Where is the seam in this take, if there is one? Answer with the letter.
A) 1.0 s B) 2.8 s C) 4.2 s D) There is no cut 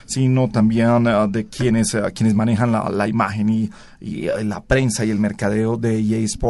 D